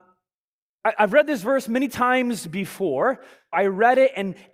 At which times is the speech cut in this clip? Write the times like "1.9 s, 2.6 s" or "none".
3.5 s